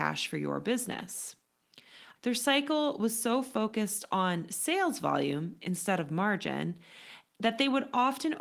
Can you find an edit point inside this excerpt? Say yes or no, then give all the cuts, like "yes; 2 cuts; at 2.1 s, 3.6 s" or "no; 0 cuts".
yes; 1 cut; at 2.2 s